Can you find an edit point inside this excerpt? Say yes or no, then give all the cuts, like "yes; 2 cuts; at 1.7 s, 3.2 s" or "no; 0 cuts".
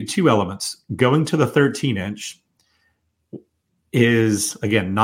no; 0 cuts